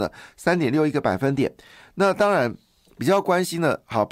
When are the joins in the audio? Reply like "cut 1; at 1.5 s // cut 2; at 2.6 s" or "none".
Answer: none